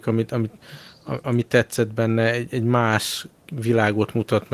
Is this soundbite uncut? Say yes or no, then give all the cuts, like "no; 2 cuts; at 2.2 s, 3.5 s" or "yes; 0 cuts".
yes; 0 cuts